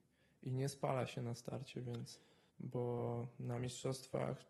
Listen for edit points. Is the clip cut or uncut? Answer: cut